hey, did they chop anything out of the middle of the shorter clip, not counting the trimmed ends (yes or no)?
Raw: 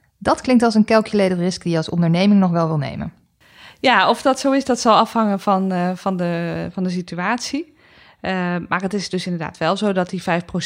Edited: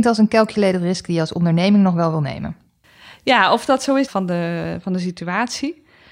yes